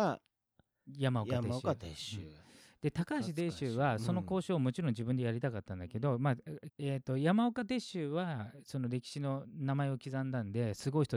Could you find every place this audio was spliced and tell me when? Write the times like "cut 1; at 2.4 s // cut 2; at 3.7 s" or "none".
cut 1; at 6.7 s